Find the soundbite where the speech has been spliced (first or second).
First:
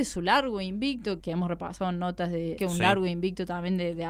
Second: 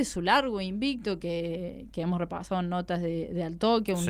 first